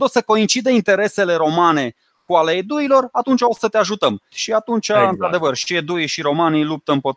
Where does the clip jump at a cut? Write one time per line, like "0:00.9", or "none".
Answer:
0:04.3